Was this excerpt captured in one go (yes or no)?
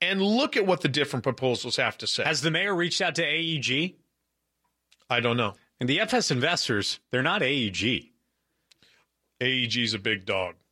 yes